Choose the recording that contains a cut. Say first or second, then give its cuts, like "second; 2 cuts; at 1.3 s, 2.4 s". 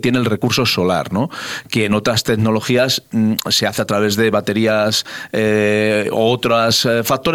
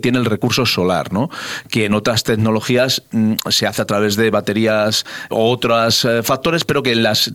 second; 1 cut; at 5.3 s